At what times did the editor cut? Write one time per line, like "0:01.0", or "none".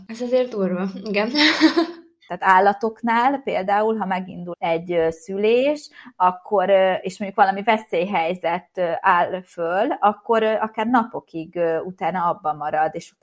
0:02.3
0:04.5

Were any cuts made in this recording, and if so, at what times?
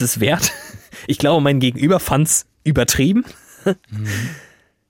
none

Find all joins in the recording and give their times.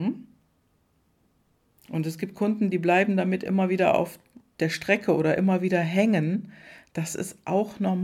none

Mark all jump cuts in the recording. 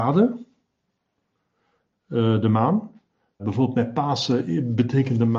0:03.4

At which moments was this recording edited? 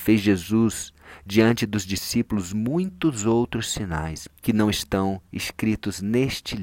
0:04.3

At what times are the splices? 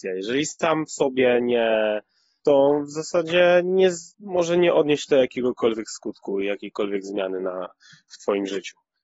0:02.4
0:04.1

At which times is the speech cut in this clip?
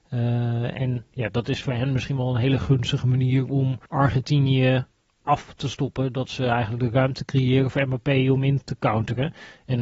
0:03.9

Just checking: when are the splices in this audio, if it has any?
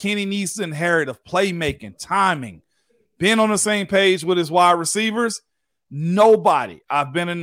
none

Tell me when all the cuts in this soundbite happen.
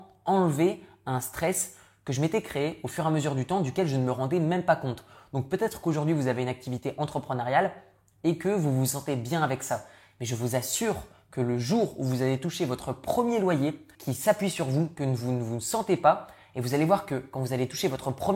0:13.9

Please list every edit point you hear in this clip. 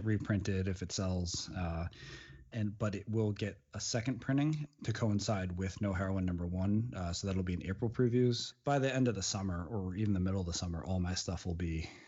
0:02.5

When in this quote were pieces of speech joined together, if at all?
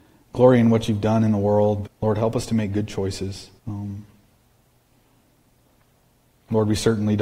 0:01.8
0:03.6

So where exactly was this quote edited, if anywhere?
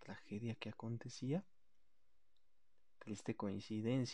none

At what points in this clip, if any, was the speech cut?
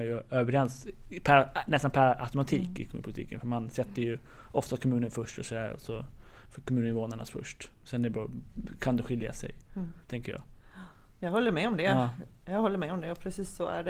none

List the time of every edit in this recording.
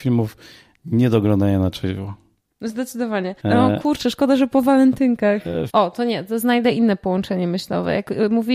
0:03.4
0:05.7

